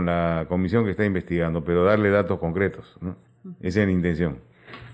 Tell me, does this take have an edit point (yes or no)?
no